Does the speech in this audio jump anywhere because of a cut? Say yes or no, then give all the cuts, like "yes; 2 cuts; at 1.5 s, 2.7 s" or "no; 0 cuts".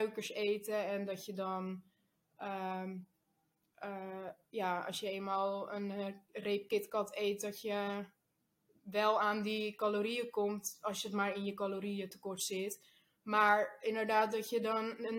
no; 0 cuts